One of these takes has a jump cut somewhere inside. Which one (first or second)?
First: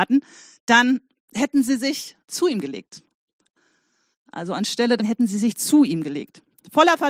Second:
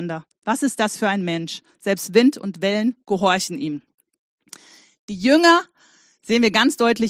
first